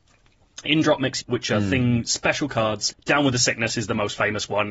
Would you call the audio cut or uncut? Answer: cut